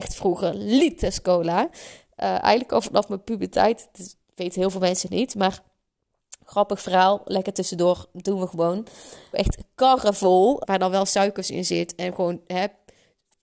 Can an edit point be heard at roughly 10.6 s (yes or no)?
yes